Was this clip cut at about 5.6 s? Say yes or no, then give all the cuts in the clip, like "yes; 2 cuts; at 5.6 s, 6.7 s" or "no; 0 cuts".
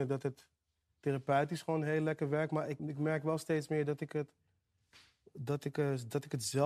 no; 1 cut; at 2.8 s